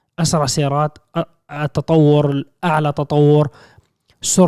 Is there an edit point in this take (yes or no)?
no